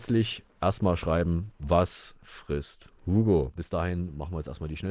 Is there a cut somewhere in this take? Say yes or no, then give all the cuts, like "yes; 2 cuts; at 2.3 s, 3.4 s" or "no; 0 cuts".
no; 0 cuts